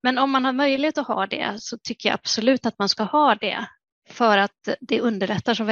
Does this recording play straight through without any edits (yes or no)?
yes